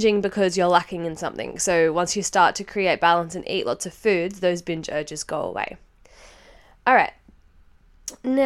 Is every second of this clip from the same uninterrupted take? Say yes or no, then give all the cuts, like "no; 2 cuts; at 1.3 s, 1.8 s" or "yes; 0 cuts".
yes; 0 cuts